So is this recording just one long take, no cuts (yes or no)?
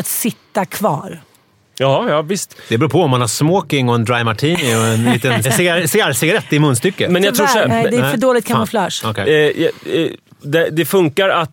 no